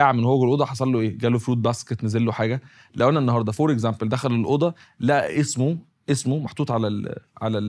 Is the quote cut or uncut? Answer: uncut